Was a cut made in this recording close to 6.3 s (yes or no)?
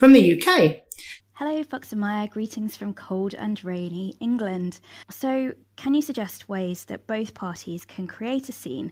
no